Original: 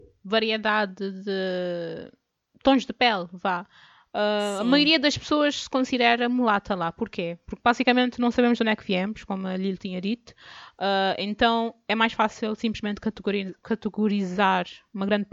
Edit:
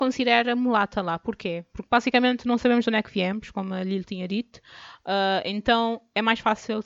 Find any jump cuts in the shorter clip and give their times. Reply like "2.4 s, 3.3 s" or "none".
none